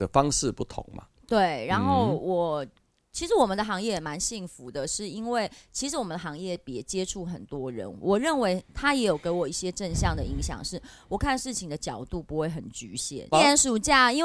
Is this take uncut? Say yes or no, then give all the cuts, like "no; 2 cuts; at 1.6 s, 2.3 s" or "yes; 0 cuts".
no; 1 cut; at 13.3 s